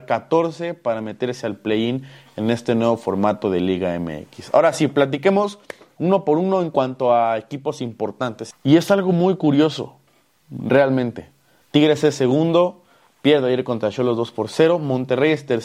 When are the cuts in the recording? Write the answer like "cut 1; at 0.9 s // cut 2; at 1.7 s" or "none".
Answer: cut 1; at 8.5 s // cut 2; at 11.6 s